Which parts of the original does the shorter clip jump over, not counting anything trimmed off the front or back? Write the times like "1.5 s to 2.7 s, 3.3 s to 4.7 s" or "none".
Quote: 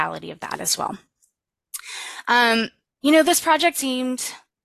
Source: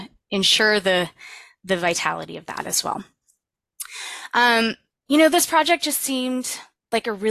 5.8 s to 6.0 s